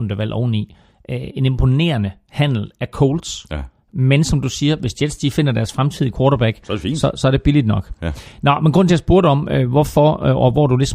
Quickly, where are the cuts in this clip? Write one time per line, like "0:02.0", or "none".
none